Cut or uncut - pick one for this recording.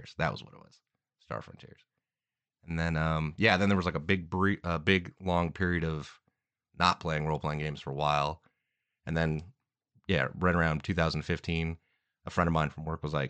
uncut